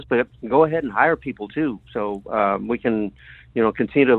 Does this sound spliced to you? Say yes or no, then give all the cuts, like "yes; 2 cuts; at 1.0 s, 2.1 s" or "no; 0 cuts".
no; 0 cuts